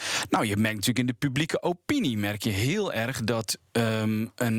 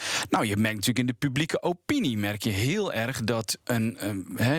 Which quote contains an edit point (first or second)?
second